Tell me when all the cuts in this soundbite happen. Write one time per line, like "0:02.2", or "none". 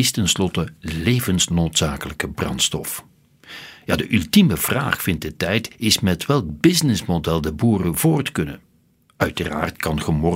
none